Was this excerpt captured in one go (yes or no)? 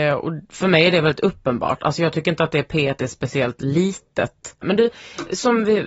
no